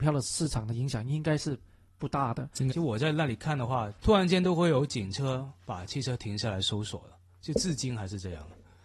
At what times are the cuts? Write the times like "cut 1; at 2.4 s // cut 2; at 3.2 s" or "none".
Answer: cut 1; at 2.7 s // cut 2; at 3.9 s

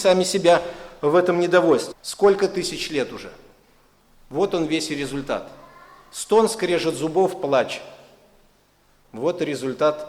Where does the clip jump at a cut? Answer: cut 1; at 1.9 s

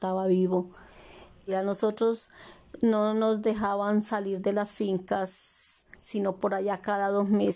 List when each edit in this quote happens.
cut 1; at 1.5 s // cut 2; at 5.9 s

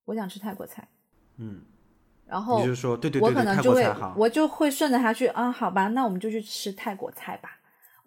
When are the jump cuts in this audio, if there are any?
none

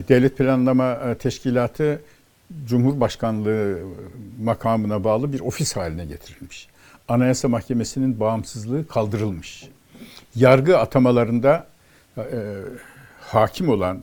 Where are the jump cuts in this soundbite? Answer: none

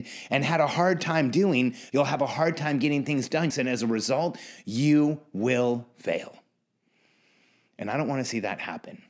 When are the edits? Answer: cut 1; at 1.9 s // cut 2; at 3.5 s

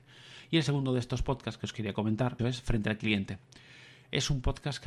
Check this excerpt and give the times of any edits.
cut 1; at 2.4 s

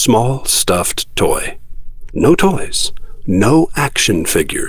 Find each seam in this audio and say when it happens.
cut 1; at 2.1 s

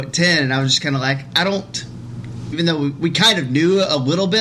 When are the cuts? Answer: cut 1; at 2.5 s

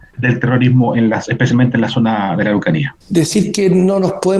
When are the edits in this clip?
cut 1; at 3.0 s

